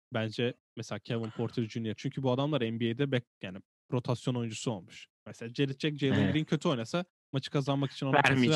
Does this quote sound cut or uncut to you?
cut